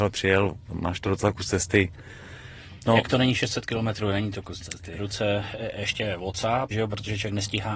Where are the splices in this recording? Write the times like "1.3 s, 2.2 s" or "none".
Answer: 5.0 s, 6.7 s

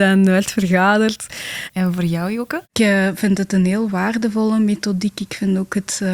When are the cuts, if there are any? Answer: 1.7 s

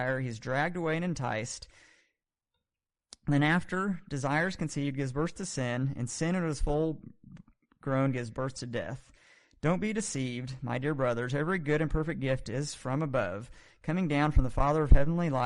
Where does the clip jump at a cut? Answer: none

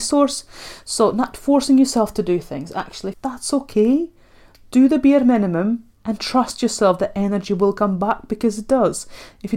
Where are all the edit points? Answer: 3.1 s, 5.9 s

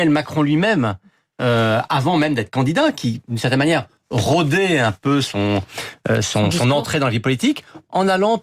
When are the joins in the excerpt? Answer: none

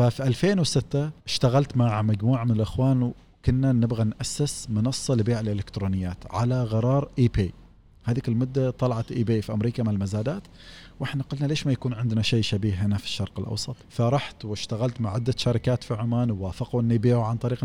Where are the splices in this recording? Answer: 1.2 s, 13.8 s

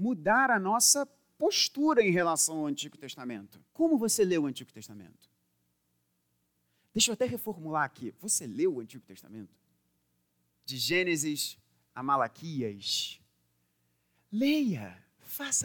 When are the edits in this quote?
3.7 s, 10.5 s

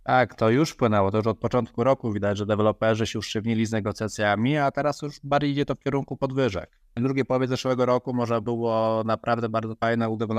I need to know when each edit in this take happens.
none

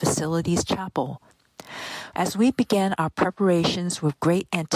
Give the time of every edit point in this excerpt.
2.1 s

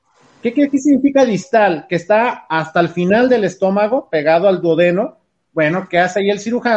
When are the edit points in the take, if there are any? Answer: none

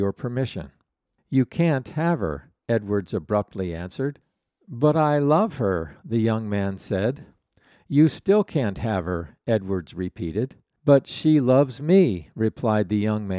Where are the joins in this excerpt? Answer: none

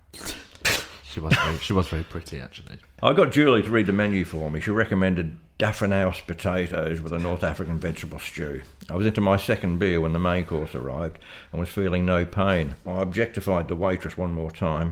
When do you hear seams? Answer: 12.8 s

